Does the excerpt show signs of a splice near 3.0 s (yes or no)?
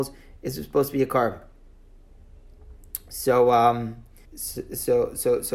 no